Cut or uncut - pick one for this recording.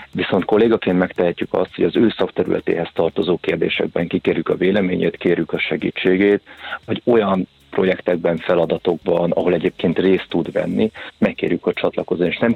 uncut